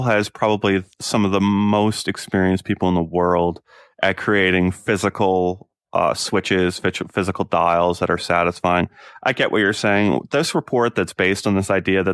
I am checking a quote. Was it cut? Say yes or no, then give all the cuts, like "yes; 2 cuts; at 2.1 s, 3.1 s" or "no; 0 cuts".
yes; 1 cut; at 0.9 s